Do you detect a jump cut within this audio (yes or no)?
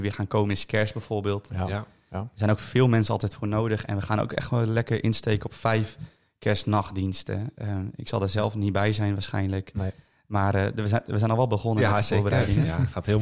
no